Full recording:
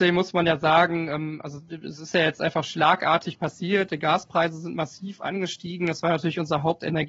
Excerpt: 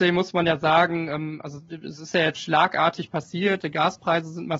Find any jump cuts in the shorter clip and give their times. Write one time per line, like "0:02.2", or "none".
0:02.4